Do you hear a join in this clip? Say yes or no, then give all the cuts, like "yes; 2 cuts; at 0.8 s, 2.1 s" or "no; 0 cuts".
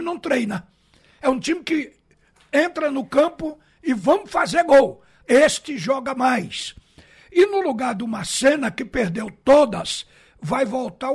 yes; 1 cut; at 5.2 s